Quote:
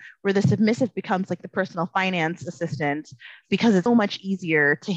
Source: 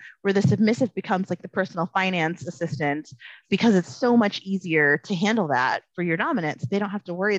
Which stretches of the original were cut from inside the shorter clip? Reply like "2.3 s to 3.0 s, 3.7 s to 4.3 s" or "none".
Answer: 3.9 s to 4.1 s